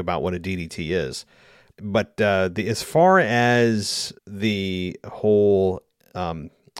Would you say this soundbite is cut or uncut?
cut